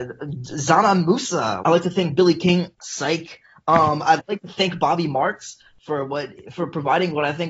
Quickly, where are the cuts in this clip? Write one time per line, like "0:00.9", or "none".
0:01.6
0:02.7
0:04.2